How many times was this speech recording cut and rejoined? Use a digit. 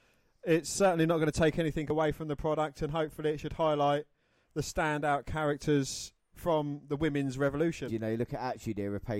1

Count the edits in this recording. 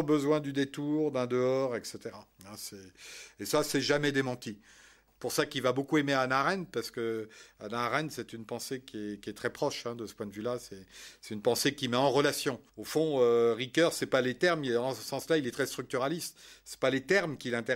1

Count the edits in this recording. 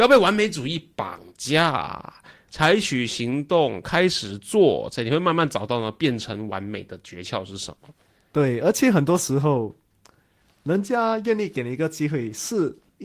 0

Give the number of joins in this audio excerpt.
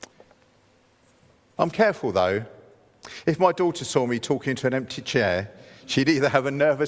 1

